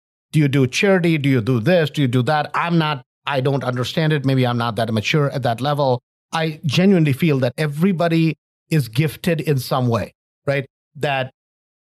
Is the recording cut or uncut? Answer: cut